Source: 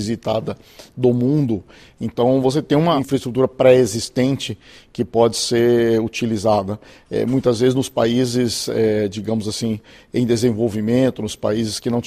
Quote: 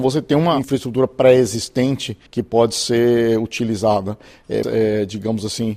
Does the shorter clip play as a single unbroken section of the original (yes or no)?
no